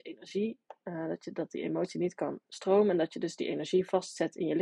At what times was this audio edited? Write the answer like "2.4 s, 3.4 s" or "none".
none